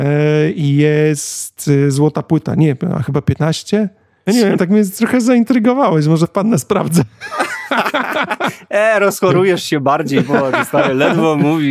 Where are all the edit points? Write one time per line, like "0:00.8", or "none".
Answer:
0:04.3